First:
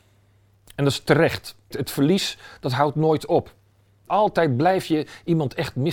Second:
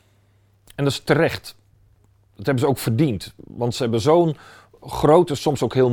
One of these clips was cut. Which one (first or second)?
first